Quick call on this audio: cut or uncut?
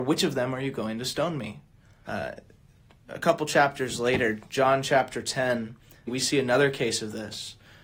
cut